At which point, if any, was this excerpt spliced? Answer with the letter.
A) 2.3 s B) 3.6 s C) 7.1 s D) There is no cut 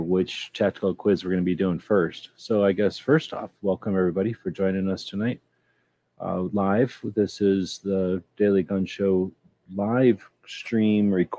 D